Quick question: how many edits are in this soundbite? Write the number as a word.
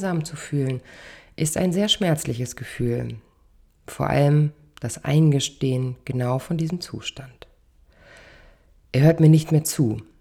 zero